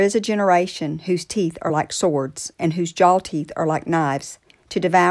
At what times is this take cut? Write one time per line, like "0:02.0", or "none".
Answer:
none